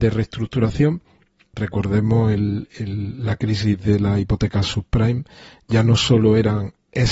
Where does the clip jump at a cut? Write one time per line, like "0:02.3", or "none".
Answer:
0:01.5